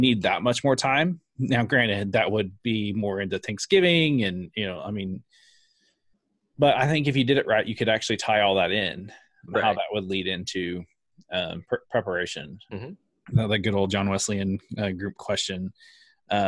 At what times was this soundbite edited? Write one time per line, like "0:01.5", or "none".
0:09.5
0:12.7